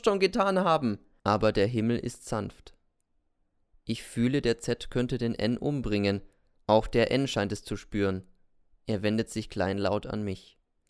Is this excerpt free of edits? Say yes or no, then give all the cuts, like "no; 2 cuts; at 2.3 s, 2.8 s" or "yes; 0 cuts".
no; 1 cut; at 1.2 s